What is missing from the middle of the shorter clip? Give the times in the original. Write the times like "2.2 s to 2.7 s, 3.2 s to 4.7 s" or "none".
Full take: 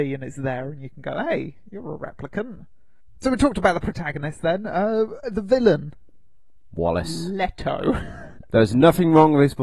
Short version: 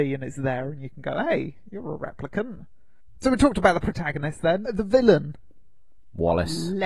4.6 s to 5.2 s